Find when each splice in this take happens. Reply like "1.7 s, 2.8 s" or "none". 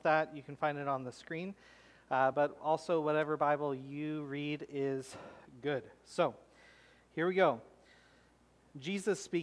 none